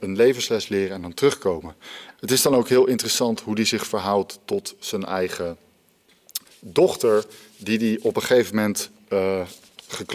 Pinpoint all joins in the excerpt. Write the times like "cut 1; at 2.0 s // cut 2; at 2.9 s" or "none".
cut 1; at 2.1 s // cut 2; at 6.4 s